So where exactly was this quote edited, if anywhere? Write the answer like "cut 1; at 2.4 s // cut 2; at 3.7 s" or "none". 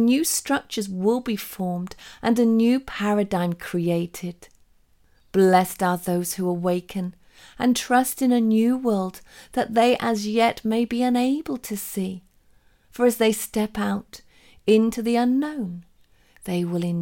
cut 1; at 5.2 s